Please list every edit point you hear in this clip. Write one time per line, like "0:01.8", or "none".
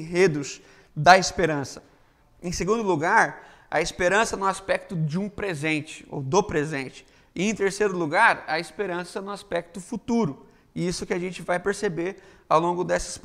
0:02.2